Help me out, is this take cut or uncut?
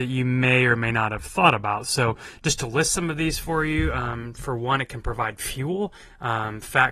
uncut